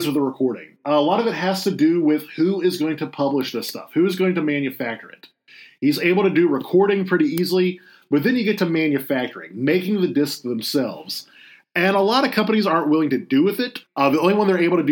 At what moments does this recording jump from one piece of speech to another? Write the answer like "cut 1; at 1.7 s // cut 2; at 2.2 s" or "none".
cut 1; at 13.8 s